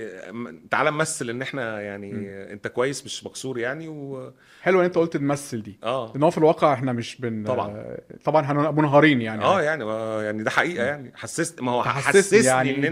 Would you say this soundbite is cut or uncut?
uncut